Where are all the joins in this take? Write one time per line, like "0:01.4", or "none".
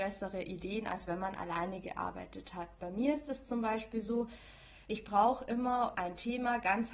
0:05.9